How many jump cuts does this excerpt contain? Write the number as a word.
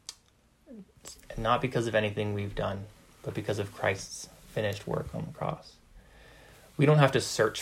one